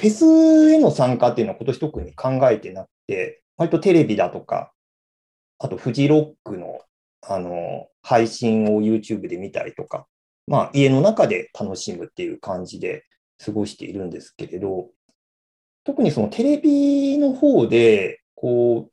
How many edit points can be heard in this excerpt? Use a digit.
1